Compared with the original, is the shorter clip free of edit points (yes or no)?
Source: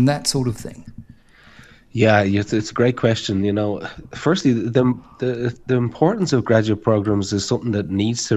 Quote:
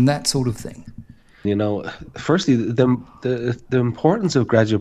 no